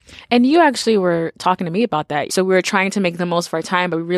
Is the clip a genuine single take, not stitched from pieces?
no; 1 cut; at 2.3 s

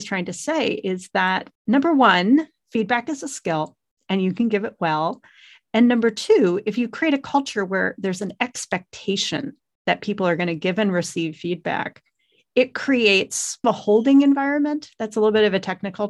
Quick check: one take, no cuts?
no; 1 cut; at 1.6 s

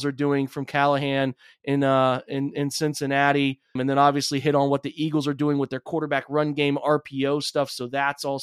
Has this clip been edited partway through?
yes; 1 cut; at 3.8 s

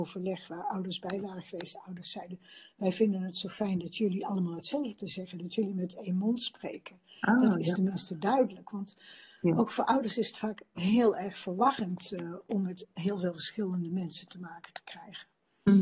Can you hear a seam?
no; 0 cuts

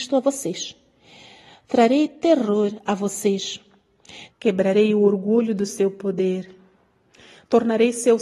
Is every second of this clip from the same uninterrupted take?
no; 1 cut; at 4.3 s

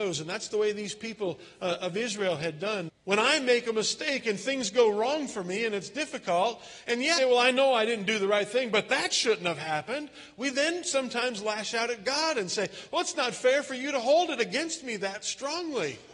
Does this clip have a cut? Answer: yes; 2 cuts; at 2.9 s, 7.2 s

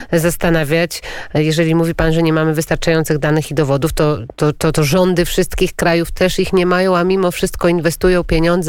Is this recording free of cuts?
yes; 0 cuts

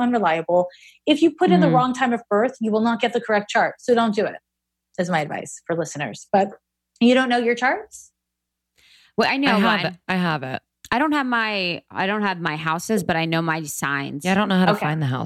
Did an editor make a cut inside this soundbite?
no; 0 cuts

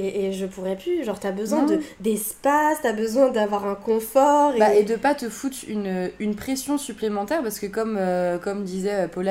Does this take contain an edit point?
no; 0 cuts

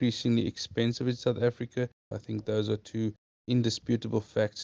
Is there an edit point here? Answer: yes; 1 cut; at 2.1 s

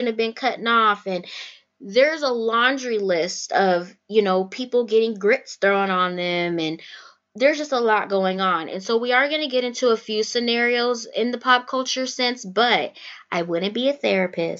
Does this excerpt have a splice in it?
no; 0 cuts

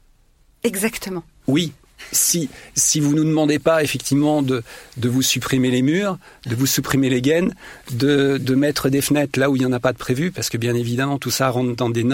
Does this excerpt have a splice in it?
no; 0 cuts

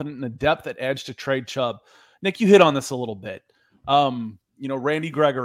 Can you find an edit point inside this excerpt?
no; 0 cuts

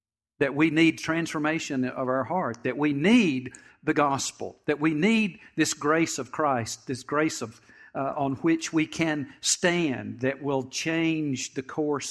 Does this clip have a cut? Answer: no; 0 cuts

